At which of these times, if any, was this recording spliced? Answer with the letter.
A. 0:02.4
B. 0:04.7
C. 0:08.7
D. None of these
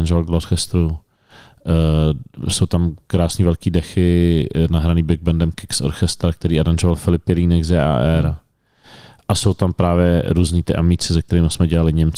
D